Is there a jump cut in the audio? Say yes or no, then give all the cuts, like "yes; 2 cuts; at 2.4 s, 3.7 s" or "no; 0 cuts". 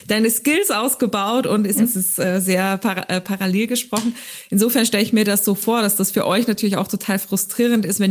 yes; 1 cut; at 1.8 s